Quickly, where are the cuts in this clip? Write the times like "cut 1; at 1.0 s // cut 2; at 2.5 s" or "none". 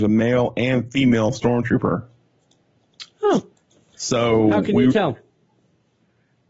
none